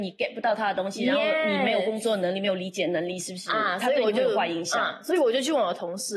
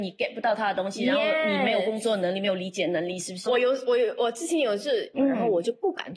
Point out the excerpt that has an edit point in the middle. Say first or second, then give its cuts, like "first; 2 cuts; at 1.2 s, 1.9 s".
second; 2 cuts; at 3.5 s, 5.1 s